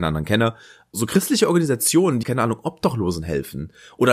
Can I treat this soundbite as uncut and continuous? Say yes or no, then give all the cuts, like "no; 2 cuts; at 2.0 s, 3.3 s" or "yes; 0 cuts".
no; 2 cuts; at 0.9 s, 2.2 s